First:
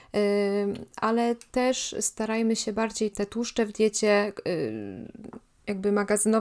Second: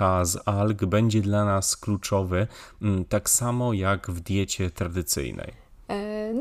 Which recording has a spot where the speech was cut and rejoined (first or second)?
first